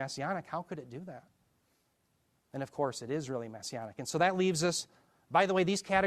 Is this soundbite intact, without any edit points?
yes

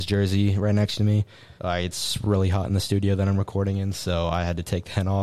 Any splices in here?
yes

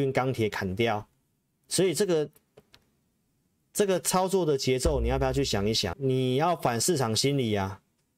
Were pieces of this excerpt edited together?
yes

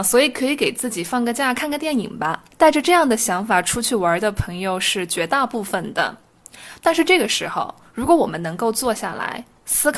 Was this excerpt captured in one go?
no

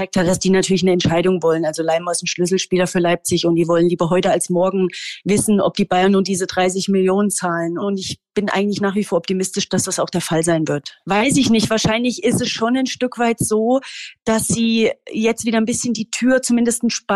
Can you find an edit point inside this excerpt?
yes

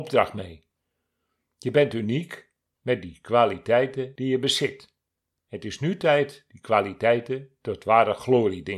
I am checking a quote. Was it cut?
no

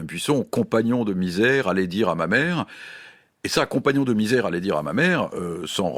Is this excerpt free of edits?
yes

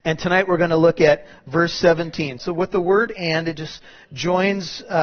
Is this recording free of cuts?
no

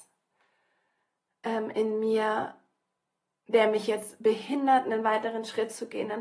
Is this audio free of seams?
yes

